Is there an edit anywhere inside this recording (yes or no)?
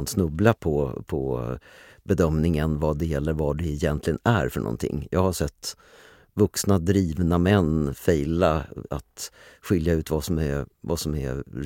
yes